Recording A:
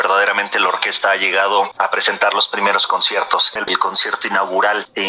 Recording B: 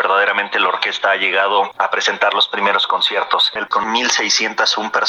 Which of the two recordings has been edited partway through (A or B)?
A